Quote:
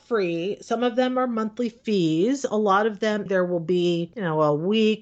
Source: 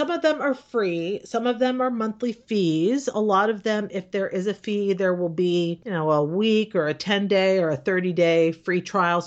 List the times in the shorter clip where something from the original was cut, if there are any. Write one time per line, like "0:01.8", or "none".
0:03.3